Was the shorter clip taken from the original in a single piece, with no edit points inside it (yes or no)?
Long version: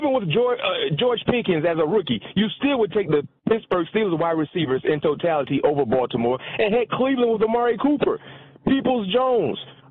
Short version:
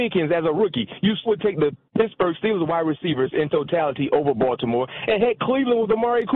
no